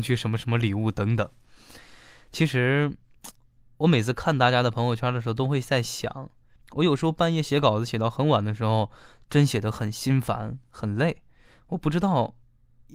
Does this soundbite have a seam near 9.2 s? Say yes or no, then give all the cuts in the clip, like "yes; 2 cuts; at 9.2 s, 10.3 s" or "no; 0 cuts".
no; 1 cut; at 6.6 s